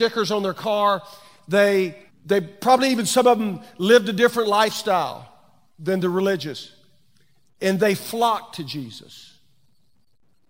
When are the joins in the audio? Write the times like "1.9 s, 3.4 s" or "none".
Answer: 2.1 s